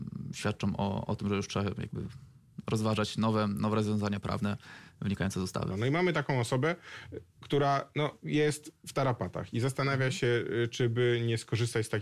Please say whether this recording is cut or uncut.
cut